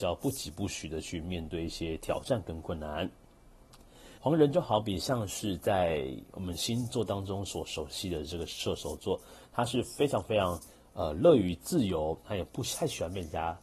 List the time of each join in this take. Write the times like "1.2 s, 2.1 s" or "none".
4.2 s, 12.2 s